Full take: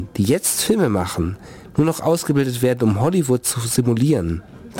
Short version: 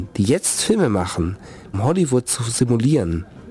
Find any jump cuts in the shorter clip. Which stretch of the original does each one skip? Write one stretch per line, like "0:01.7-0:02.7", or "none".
0:01.7-0:02.9